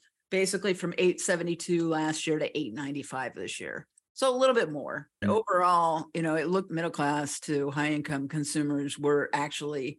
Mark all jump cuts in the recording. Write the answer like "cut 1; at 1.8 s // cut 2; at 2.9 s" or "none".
cut 1; at 5.2 s // cut 2; at 6.7 s